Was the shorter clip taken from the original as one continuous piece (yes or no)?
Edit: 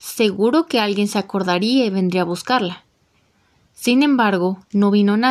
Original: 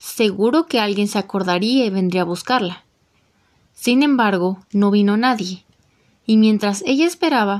yes